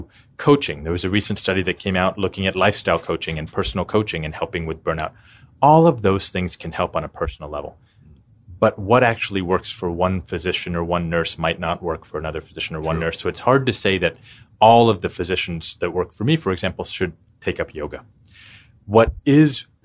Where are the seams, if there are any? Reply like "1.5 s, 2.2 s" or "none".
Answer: none